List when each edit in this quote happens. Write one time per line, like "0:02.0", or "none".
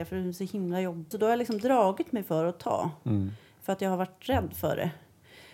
0:01.1